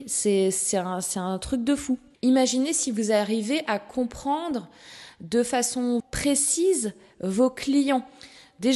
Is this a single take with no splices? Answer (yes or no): no